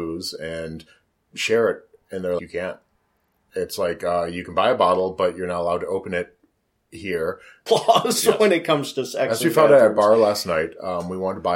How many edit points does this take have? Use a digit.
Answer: 2